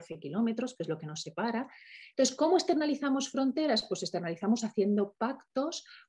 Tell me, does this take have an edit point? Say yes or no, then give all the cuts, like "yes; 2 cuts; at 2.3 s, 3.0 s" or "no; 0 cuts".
yes; 1 cut; at 2.1 s